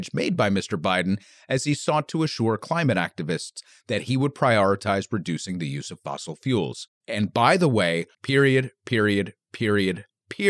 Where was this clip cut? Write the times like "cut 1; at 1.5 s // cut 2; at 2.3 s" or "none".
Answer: cut 1; at 6.9 s // cut 2; at 8.1 s